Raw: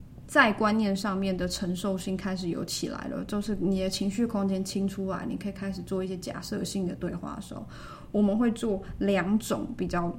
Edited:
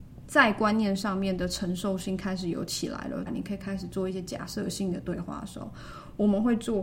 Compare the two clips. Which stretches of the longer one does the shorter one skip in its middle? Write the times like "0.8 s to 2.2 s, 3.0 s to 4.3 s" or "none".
3.3 s to 5.2 s